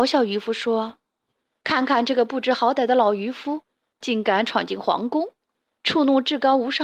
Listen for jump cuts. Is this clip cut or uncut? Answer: uncut